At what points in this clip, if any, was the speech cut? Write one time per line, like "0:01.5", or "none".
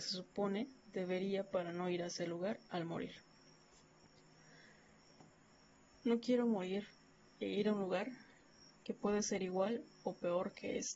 none